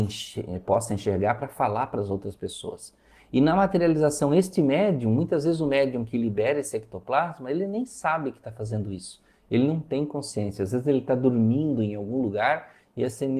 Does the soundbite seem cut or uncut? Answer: uncut